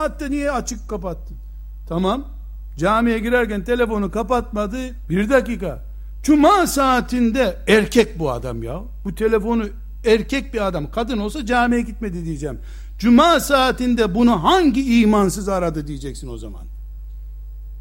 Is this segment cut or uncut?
cut